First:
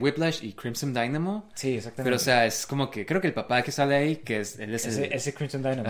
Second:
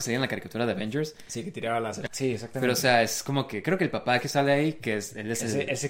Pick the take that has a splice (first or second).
second